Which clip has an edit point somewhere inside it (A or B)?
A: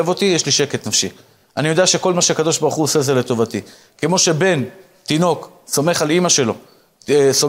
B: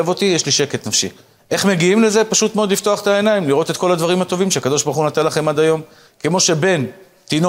B